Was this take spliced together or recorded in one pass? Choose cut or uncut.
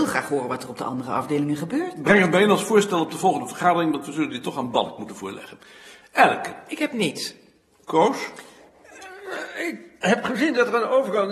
uncut